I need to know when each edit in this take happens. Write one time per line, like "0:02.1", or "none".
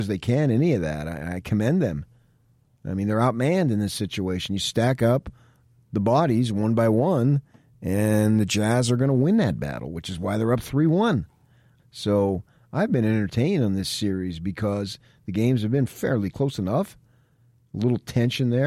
0:11.8
0:16.3

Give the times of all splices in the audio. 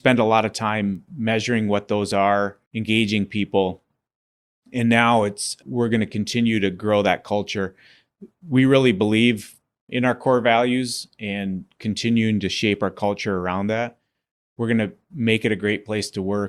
0:02.7

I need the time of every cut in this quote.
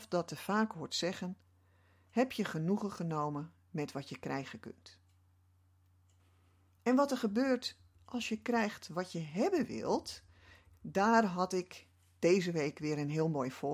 0:10.7

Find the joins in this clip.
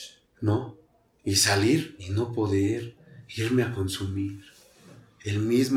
none

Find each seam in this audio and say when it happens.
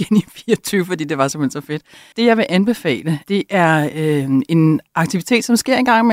0:02.1
0:03.2

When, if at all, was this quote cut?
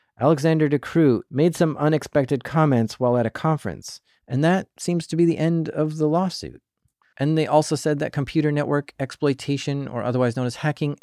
0:01.3
0:04.2
0:07.0

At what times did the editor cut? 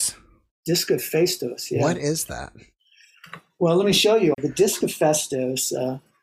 0:04.3

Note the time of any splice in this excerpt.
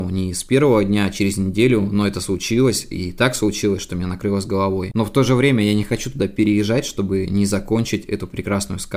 none

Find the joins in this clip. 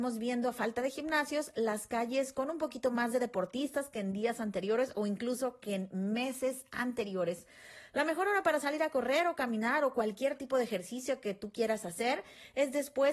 none

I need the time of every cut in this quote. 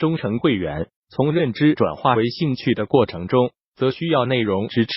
0:01.0

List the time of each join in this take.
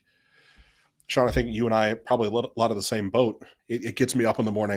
0:03.6

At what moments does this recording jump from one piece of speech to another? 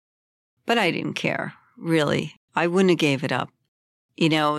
none

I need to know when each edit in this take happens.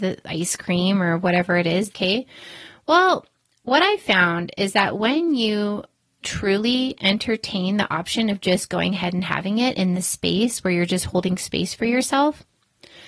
0:01.9
0:06.2

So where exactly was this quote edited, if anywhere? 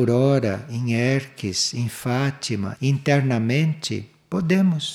0:02.8

